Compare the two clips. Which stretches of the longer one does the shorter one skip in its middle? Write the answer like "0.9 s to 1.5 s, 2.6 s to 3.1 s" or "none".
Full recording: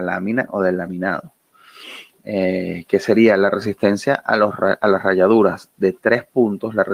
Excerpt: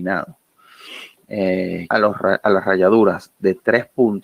2.9 s to 4.3 s